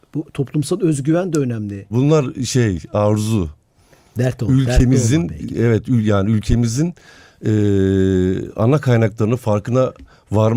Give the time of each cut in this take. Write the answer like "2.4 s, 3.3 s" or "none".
1.9 s

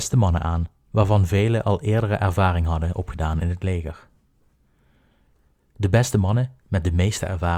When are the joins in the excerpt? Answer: none

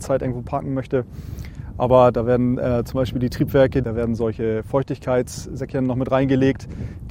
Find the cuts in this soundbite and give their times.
3.8 s

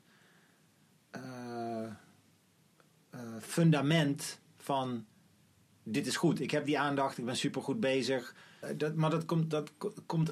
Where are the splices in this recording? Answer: 8.6 s

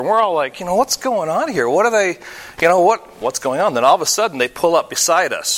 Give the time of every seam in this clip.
3.2 s

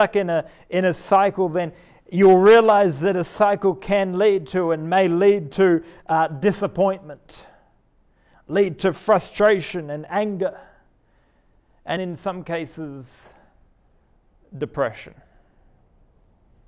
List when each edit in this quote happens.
12.0 s

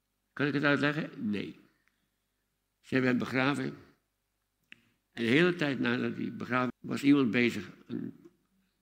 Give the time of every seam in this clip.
6.7 s

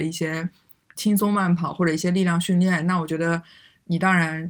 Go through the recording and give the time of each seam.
none

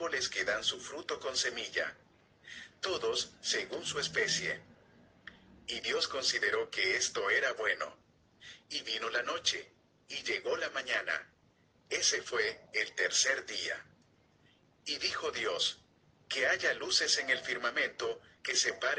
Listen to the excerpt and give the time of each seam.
none

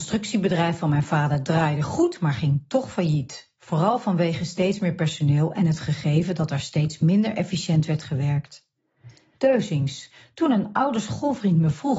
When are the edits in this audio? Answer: 9.3 s

